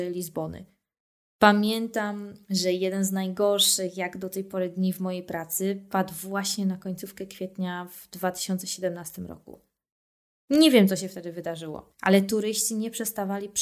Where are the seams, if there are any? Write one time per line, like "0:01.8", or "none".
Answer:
none